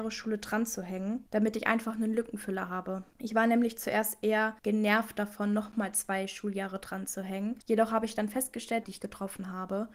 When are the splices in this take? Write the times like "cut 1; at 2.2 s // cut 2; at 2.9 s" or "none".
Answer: cut 1; at 8.8 s